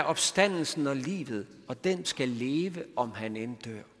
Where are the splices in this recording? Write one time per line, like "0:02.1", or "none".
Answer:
0:02.0